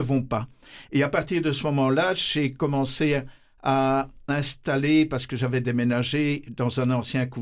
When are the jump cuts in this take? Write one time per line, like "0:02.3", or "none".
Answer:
none